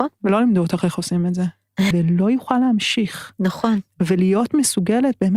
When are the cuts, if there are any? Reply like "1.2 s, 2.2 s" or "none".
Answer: 1.9 s